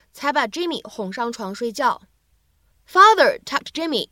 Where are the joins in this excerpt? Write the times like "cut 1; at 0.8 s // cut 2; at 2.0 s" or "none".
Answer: none